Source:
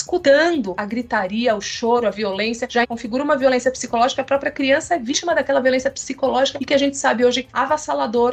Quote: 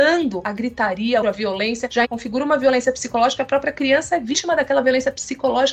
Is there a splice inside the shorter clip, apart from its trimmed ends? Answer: yes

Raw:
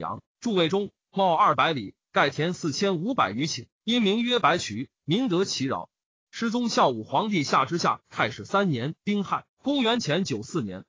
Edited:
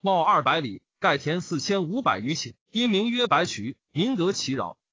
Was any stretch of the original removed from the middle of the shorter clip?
no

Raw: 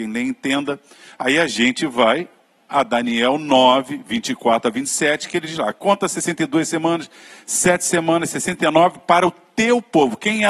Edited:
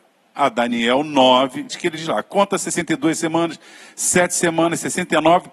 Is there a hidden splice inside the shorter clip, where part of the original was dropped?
yes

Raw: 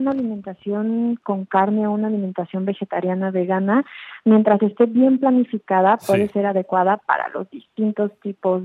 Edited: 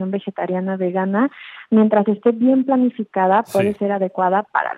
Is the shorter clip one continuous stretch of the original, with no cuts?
yes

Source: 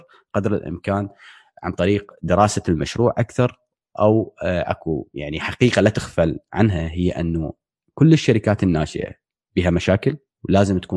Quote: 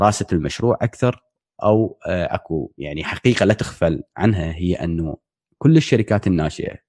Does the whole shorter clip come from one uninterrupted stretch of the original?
yes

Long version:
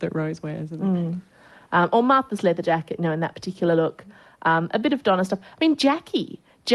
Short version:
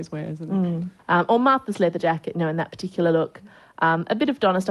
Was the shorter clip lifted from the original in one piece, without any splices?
no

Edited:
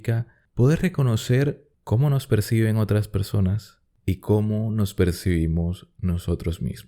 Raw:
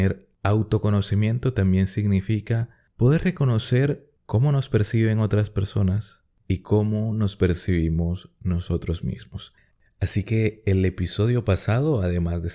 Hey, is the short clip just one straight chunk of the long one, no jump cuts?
yes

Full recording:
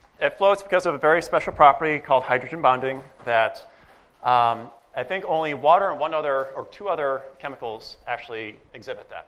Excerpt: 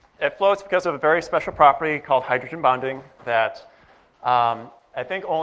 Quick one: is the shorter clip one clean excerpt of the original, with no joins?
yes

